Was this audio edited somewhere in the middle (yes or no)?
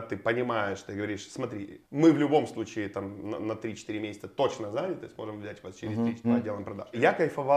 yes